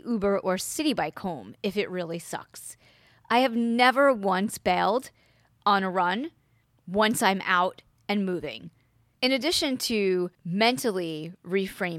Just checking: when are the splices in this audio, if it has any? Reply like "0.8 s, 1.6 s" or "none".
9.1 s, 10.3 s